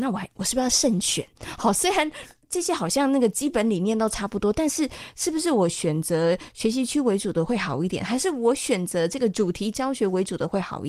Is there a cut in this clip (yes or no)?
no